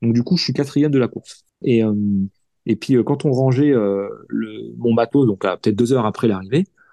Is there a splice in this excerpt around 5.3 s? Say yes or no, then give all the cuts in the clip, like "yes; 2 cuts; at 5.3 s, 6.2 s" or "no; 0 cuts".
no; 1 cut; at 1.6 s